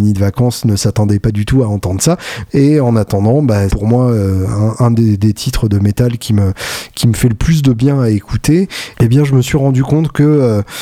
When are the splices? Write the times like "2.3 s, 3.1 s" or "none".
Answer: 2.5 s, 3.7 s, 8.9 s